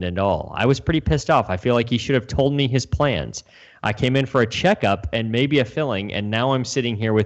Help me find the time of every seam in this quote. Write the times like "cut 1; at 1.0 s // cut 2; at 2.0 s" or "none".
none

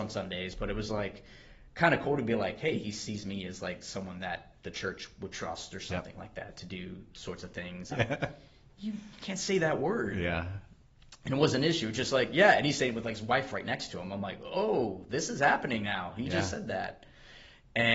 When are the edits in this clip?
cut 1; at 7.9 s

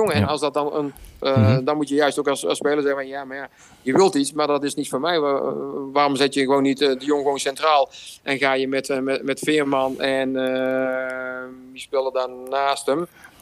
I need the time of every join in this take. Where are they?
cut 1; at 1.2 s

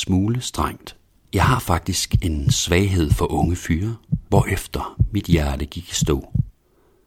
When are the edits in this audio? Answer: cut 1; at 1.3 s // cut 2; at 4.3 s

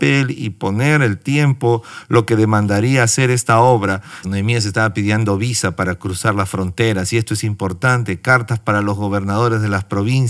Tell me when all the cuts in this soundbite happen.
cut 1; at 4.2 s

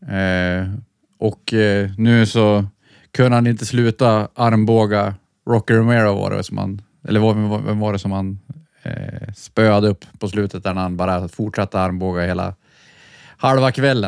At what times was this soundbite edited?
none

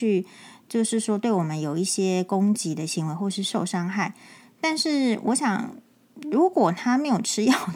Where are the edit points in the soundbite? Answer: none

